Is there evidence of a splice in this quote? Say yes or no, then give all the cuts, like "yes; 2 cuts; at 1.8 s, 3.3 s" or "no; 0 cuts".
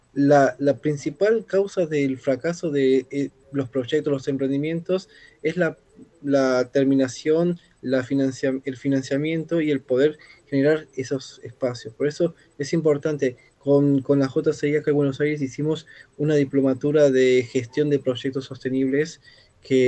no; 0 cuts